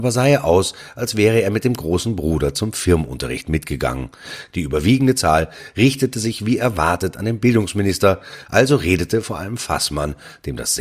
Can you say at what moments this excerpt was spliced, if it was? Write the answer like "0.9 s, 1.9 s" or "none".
4.5 s, 8.5 s